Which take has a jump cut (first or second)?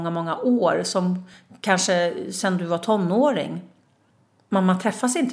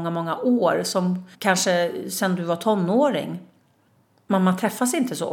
second